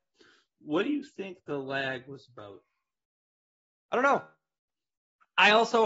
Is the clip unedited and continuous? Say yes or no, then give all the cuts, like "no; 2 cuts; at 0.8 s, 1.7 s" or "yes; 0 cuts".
no; 1 cut; at 3.8 s